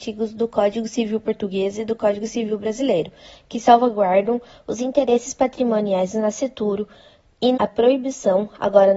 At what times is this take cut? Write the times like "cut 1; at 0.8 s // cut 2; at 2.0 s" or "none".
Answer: cut 1; at 7.5 s